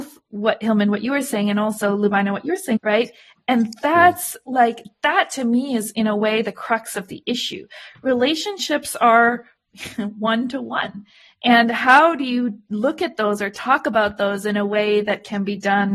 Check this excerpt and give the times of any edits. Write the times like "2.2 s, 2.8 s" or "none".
2.8 s